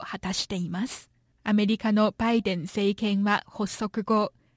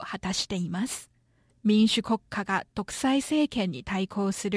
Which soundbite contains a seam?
first; 1 cut; at 1.3 s

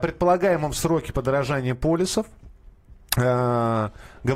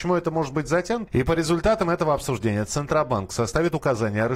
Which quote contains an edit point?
second; 1 cut; at 1.1 s

